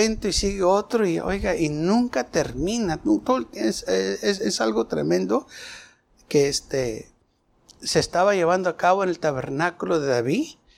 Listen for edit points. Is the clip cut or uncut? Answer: uncut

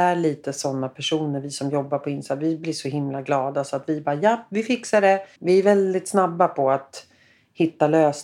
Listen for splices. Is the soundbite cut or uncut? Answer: cut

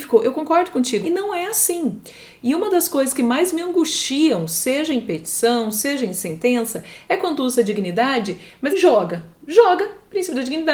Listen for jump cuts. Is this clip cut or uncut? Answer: cut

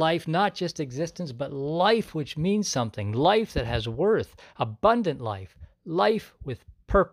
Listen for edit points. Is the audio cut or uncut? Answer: uncut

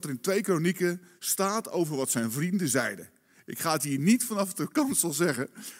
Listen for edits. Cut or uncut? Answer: uncut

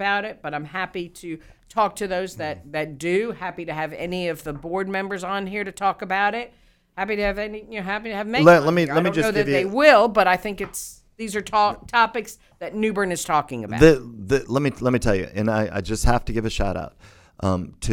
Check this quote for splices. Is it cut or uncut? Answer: uncut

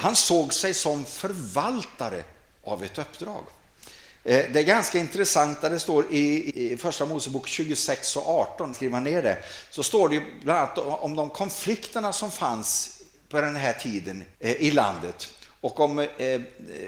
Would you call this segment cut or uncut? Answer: cut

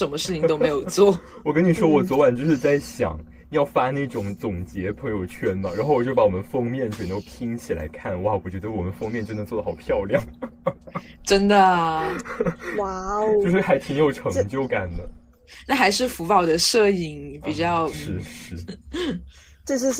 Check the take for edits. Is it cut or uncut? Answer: cut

